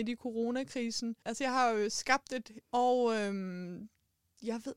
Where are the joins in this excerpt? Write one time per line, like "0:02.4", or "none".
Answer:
0:01.2
0:02.6